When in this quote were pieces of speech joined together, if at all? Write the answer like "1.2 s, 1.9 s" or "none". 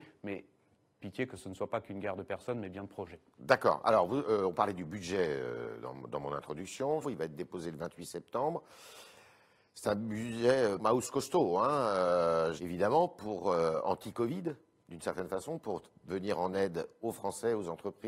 7.0 s, 10.8 s, 12.6 s